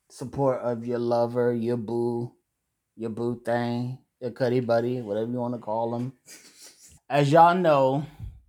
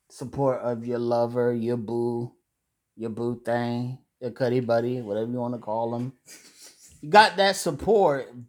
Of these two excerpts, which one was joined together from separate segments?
first; 1 cut; at 7.0 s

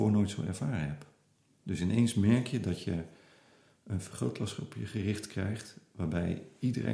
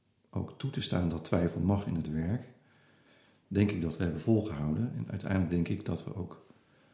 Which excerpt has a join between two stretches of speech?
second; 1 cut; at 4.9 s

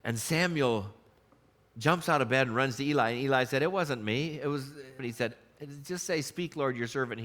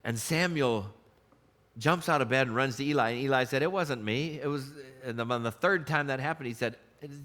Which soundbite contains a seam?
first; 1 cut; at 5.0 s

